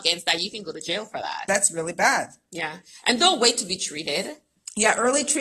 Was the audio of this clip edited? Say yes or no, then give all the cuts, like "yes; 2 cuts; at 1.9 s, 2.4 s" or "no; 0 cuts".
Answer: yes; 1 cut; at 1.5 s